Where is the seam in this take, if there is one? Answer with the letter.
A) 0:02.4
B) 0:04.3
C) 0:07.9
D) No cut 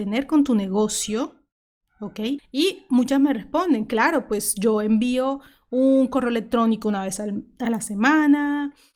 A